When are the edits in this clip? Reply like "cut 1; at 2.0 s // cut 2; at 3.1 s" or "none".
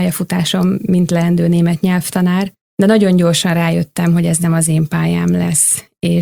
none